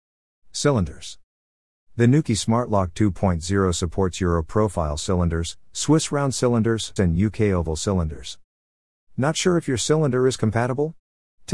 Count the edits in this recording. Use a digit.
1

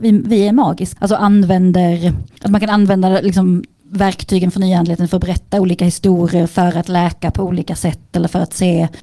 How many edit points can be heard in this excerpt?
1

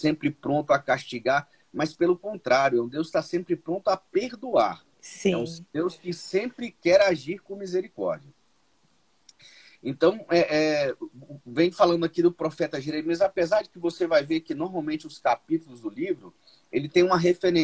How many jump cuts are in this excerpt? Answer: 0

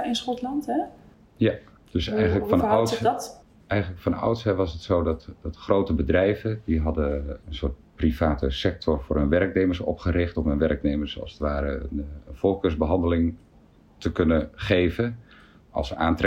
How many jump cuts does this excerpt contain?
0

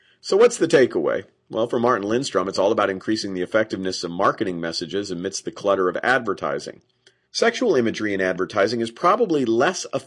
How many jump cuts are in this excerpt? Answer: 1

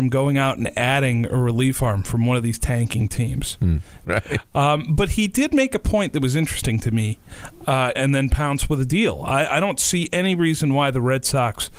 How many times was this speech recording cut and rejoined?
2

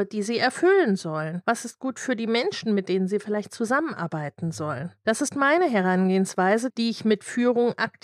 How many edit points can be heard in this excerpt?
1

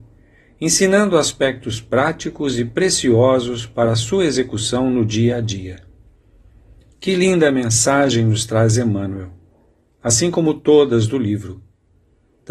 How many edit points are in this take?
1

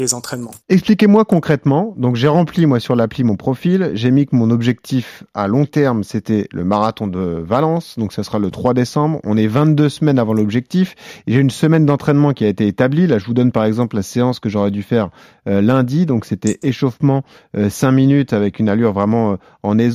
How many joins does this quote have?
0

